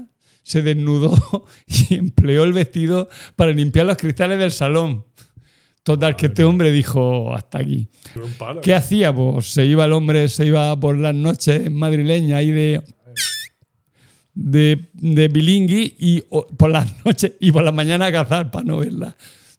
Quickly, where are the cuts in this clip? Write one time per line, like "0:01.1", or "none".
0:08.2